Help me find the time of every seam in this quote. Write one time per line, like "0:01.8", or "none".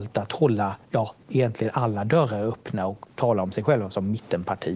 0:03.1